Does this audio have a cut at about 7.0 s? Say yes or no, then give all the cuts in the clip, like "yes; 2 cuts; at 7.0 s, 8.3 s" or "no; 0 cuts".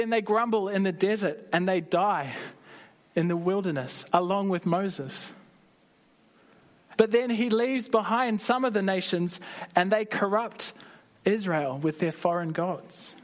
yes; 1 cut; at 7.0 s